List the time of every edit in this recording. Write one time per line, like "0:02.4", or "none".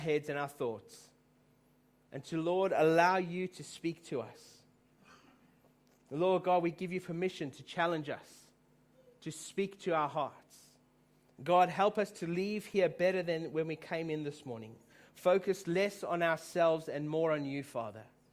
none